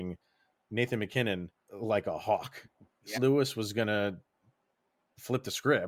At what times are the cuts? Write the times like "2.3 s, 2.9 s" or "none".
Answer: 1.6 s, 3.1 s